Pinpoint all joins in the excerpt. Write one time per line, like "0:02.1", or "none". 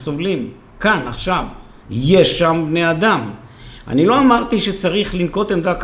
0:01.8